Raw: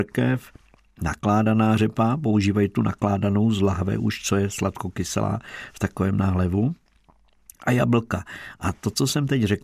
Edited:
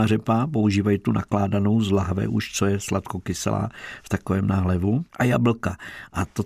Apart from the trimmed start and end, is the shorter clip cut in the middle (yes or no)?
yes